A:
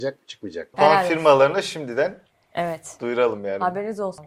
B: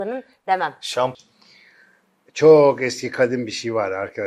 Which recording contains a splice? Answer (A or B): B